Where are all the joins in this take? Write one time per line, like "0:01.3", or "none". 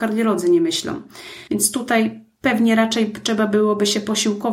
0:01.5